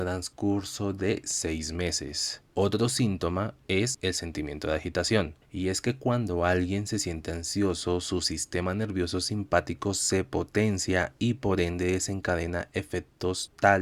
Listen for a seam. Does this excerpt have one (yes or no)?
yes